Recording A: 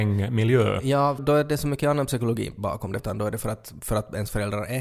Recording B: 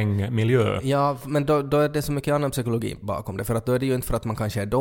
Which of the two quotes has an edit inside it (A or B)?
A